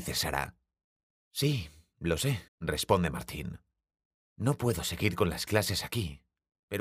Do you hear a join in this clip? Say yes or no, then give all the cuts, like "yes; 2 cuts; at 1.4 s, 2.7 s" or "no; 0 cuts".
yes; 1 cut; at 2.5 s